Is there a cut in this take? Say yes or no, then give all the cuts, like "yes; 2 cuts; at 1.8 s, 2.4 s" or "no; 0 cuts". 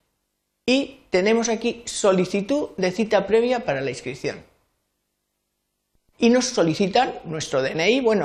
yes; 1 cut; at 6.1 s